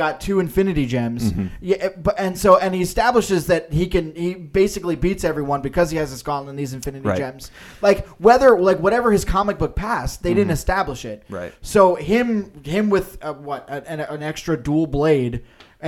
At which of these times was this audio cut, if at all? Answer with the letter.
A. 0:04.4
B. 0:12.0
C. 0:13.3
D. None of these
D